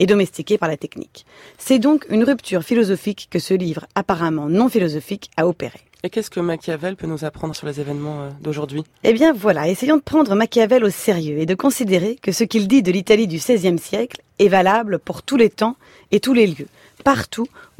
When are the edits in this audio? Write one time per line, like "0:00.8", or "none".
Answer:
0:07.5